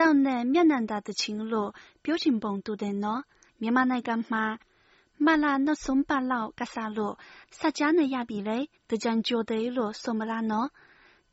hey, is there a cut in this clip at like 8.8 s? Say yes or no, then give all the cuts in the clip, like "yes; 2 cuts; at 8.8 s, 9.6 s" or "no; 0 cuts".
yes; 3 cuts; at 3.5 s, 7.4 s, 8.8 s